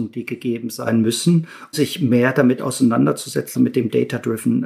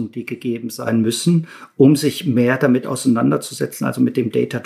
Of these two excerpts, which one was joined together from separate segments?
first; 2 cuts; at 1.7 s, 3.5 s

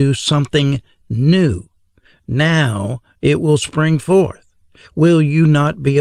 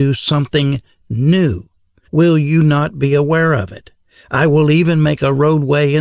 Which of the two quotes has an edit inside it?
second; 1 cut; at 2.0 s

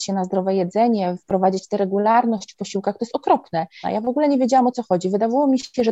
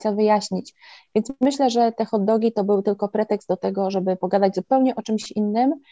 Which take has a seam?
first; 1 cut; at 3.8 s

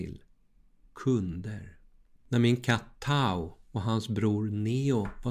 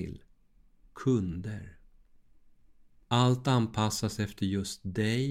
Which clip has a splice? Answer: first; 1 cut; at 2.2 s

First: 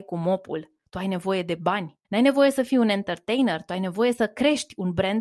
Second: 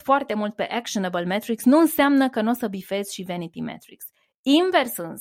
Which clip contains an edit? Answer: first; 1 cut; at 2.0 s

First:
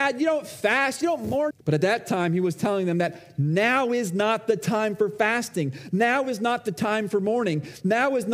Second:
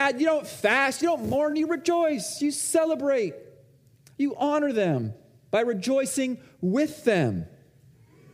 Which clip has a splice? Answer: first; 1 cut; at 1.5 s

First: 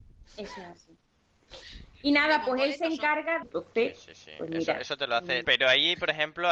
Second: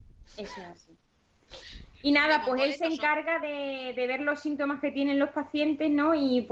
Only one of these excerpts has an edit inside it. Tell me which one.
first; 2 cuts; at 3.4 s, 5.4 s

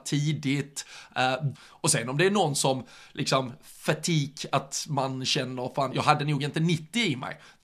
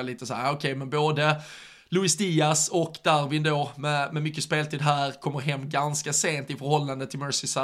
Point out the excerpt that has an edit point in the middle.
first; 2 cuts; at 1.5 s, 5.9 s

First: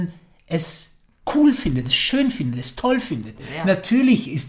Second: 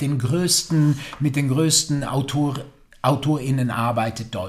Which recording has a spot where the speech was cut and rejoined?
first; 1 cut; at 3.4 s

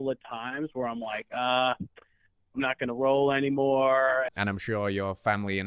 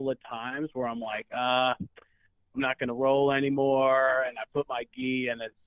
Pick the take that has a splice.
first; 1 cut; at 4.3 s

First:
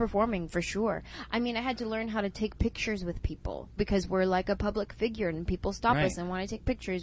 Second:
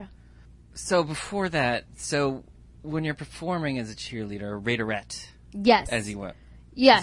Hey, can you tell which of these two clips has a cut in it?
first; 2 cuts; at 3.8 s, 5.3 s

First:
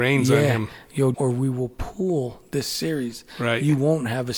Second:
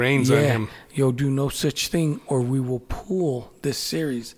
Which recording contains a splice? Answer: first; 1 cut; at 1.1 s

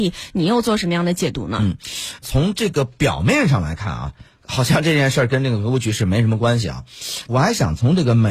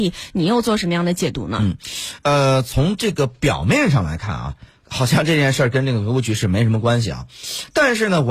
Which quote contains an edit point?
first; 2 cuts; at 2.2 s, 7.3 s

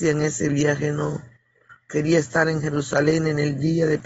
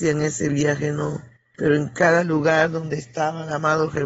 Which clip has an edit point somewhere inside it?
second; 1 cut; at 1.5 s

